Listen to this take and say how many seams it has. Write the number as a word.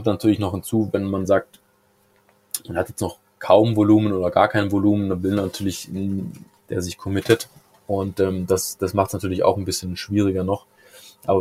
one